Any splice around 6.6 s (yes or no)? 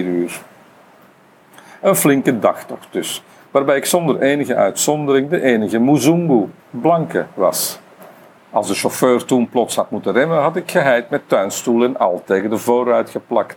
yes